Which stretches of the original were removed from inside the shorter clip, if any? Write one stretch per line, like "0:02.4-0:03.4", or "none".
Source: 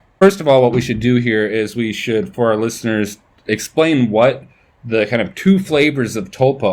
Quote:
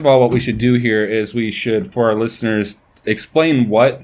none